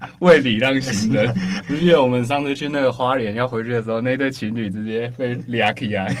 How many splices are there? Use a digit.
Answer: 1